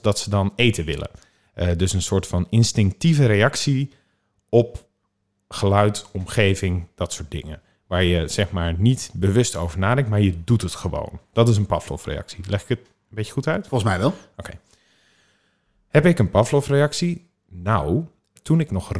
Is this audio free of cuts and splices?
yes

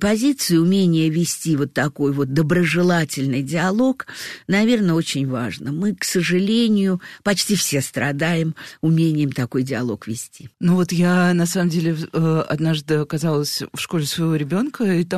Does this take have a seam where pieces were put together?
yes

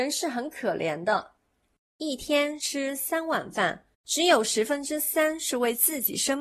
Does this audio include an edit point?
yes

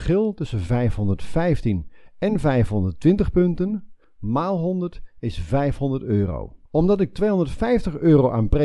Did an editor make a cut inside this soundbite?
yes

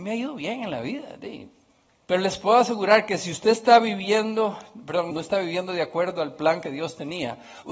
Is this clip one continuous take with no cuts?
no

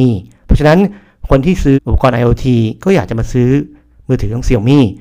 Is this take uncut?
no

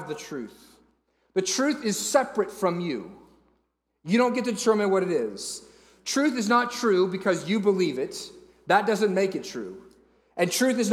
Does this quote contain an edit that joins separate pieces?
no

